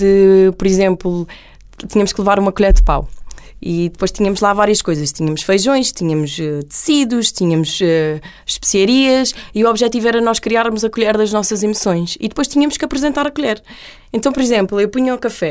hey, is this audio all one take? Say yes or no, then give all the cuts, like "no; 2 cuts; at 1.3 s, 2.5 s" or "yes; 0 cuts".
yes; 0 cuts